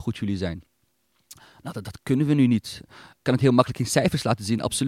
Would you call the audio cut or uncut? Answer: uncut